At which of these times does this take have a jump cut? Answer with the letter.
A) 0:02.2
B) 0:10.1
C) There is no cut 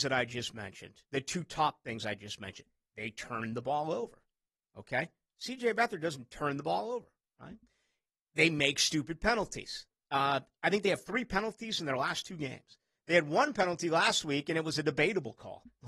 B